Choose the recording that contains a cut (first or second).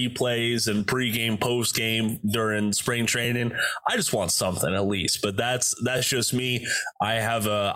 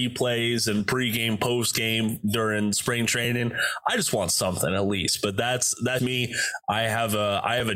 second